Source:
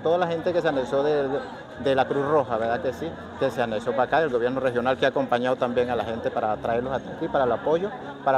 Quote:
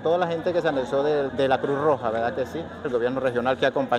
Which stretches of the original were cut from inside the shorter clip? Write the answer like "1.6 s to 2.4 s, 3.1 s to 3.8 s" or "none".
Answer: 1.3 s to 1.8 s, 3.3 s to 4.2 s